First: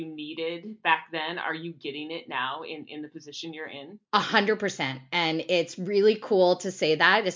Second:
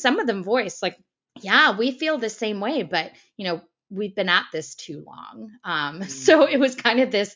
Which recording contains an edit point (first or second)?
first